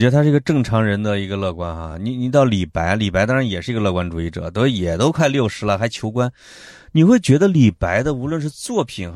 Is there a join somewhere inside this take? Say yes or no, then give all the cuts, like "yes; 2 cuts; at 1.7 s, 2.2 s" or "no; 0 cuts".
no; 0 cuts